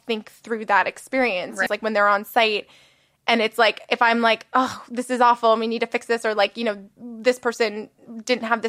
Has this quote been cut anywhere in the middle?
yes; 1 cut; at 1.7 s

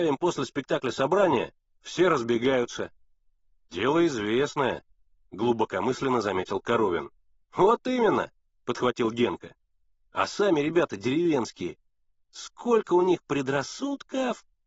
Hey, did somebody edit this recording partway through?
no; 0 cuts

